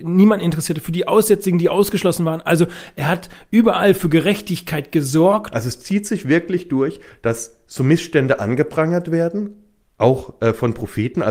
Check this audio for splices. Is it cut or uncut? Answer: cut